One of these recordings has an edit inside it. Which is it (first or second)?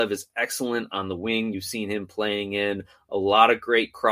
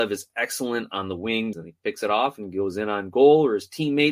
second